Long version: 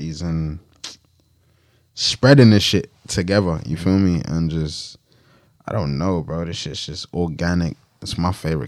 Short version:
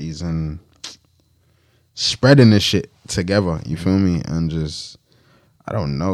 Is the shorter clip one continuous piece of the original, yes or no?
yes